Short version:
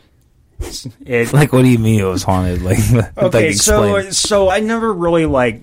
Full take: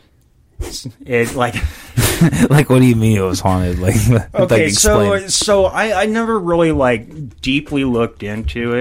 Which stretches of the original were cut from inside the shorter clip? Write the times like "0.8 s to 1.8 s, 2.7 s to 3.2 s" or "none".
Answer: 1.3 s to 2.5 s, 5.7 s to 6.0 s